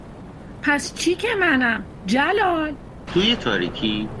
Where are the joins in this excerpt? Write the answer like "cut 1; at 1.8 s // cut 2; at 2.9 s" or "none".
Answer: cut 1; at 3.1 s